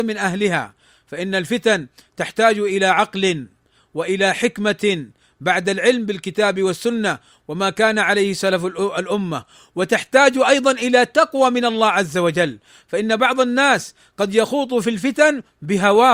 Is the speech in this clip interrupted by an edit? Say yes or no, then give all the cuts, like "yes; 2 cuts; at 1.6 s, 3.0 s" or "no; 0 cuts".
no; 0 cuts